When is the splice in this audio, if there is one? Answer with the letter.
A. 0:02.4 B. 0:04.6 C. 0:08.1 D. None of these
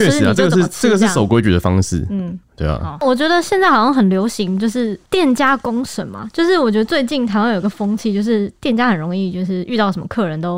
D